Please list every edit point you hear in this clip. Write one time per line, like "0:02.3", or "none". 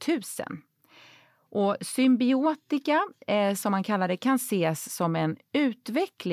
none